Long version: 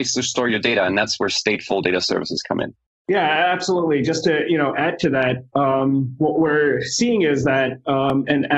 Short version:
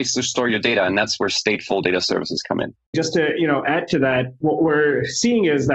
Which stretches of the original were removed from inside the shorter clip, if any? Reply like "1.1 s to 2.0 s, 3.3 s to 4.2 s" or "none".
2.9 s to 4.0 s, 5.5 s to 6.2 s